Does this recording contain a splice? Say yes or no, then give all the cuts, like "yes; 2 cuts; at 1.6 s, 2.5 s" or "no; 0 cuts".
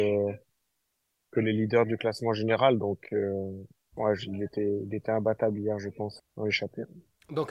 yes; 1 cut; at 6.2 s